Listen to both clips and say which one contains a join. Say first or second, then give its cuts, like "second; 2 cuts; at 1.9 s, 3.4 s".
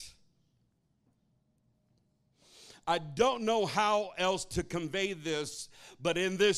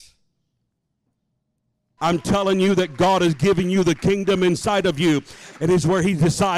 second; 2 cuts; at 2.0 s, 5.5 s